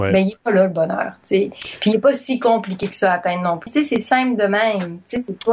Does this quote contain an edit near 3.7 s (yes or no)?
yes